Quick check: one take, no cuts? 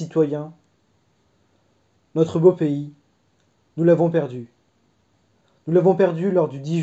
yes; 0 cuts

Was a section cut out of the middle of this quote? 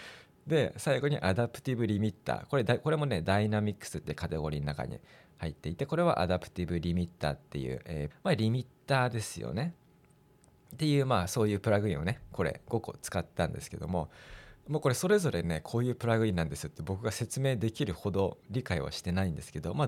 yes; 1 cut; at 8.1 s

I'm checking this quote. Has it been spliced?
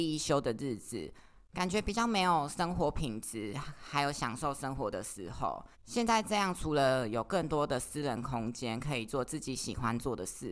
yes; 1 cut; at 5.7 s

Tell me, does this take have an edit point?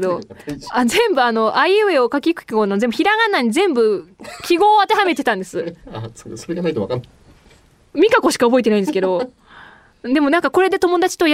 yes; 1 cut; at 5.8 s

